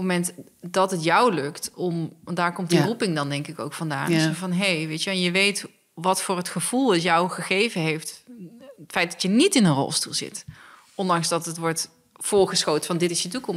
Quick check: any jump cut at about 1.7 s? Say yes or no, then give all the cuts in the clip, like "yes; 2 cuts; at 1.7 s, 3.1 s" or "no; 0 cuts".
no; 0 cuts